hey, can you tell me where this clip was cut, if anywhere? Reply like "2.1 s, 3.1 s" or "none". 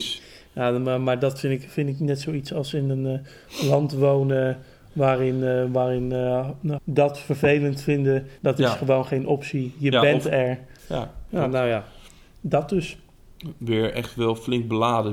6.8 s, 8.4 s, 10.8 s